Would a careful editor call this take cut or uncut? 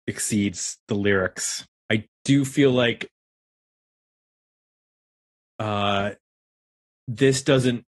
cut